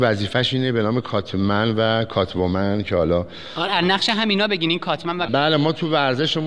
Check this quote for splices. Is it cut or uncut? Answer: cut